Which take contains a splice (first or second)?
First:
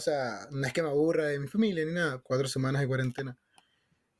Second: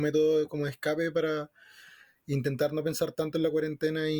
first